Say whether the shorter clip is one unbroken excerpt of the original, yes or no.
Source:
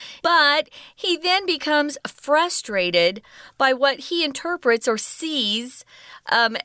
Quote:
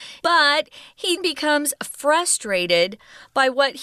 no